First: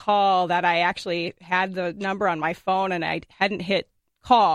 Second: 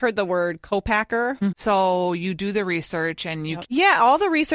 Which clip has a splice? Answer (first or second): second